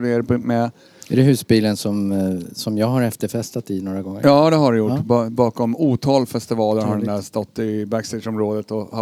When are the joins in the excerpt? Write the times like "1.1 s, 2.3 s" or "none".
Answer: none